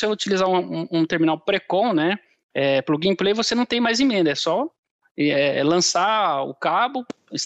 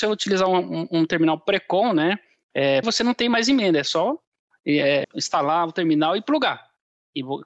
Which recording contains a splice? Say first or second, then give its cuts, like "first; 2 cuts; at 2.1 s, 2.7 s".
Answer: second; 2 cuts; at 2.8 s, 5.0 s